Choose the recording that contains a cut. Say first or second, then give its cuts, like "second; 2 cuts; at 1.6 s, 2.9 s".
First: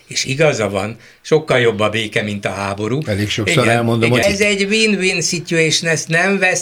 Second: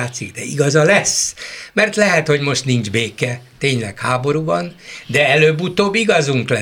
first; 1 cut; at 4.2 s